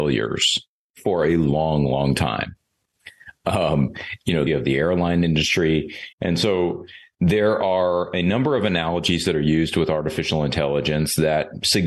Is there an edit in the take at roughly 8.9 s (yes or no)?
no